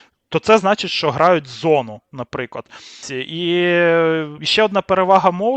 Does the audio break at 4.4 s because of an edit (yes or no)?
yes